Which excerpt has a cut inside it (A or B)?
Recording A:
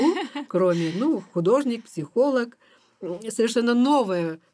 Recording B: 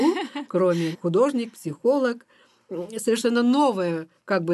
B